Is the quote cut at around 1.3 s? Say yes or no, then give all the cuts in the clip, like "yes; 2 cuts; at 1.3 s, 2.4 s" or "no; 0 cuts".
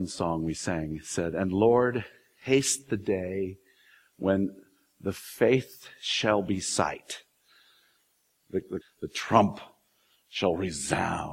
no; 1 cut; at 8.8 s